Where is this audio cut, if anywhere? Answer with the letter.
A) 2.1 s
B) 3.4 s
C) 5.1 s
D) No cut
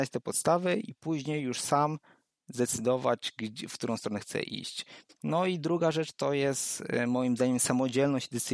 C